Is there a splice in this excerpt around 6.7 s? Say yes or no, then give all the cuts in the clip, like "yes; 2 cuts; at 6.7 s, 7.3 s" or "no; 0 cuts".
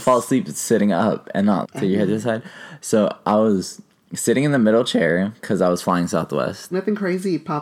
yes; 2 cuts; at 1.6 s, 6.7 s